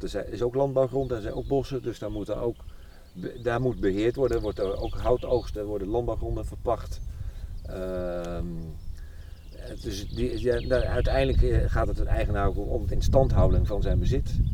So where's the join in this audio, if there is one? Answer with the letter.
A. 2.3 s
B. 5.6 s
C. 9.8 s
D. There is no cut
B